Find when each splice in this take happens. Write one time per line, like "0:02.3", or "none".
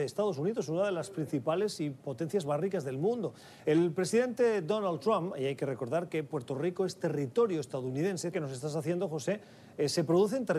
0:03.6
0:08.3